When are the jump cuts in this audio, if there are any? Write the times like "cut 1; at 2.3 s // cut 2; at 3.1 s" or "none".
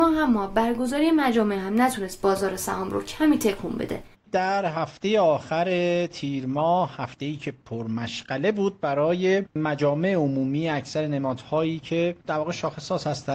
cut 1; at 4.1 s